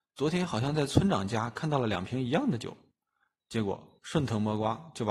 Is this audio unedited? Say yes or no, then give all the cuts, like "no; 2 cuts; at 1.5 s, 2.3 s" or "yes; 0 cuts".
yes; 0 cuts